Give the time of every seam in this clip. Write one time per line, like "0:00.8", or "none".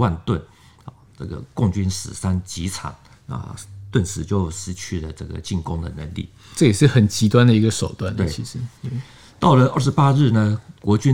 0:01.2